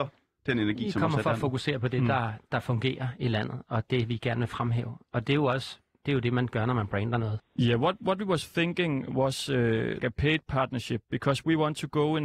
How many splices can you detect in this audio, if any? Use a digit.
2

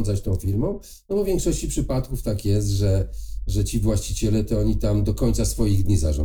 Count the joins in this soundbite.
0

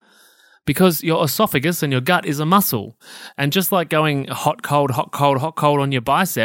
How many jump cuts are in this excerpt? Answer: 0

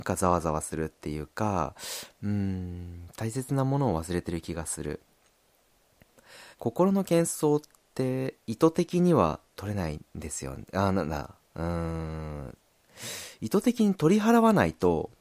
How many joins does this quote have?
2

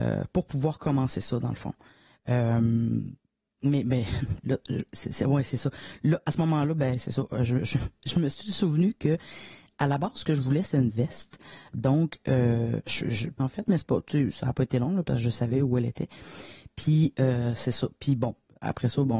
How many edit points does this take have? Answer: 1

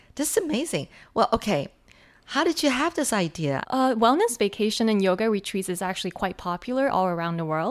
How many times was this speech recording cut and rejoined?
1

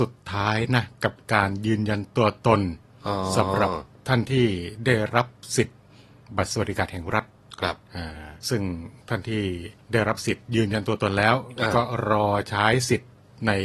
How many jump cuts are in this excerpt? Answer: 2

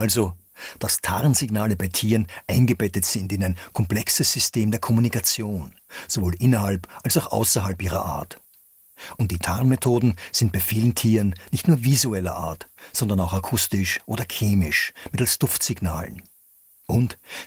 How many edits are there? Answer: 0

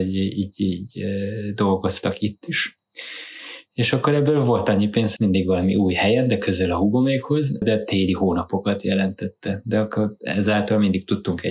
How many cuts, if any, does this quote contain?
2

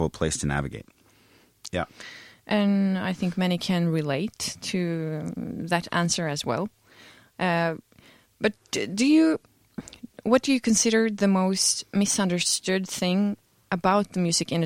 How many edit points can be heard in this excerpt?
1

